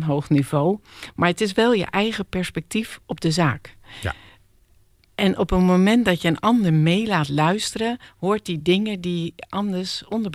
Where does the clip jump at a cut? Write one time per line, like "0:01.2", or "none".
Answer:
none